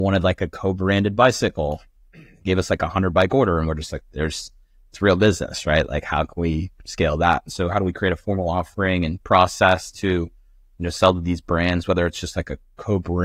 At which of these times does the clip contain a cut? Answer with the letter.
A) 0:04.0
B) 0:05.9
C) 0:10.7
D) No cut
A